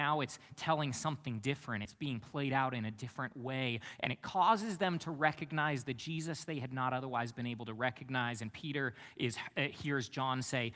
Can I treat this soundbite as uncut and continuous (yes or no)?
yes